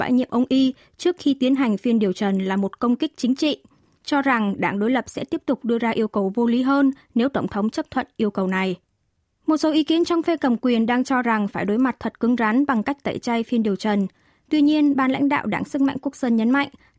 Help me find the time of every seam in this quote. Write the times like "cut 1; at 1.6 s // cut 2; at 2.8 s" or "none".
none